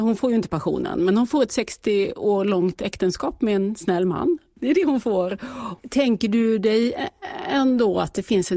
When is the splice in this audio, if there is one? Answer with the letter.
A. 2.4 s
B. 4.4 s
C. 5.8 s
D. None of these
C